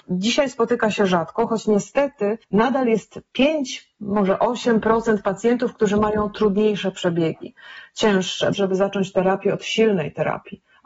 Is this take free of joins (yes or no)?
no